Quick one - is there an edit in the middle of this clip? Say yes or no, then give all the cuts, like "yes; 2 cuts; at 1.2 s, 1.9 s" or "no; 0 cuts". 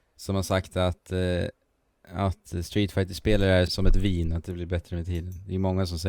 yes; 1 cut; at 3.7 s